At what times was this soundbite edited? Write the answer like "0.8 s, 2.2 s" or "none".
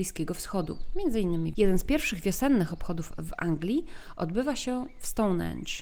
1.5 s